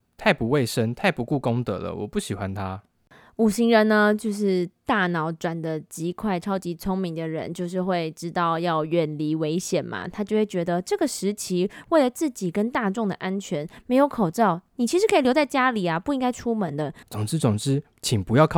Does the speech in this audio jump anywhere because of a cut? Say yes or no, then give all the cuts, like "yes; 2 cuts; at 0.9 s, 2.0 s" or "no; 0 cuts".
yes; 1 cut; at 17.0 s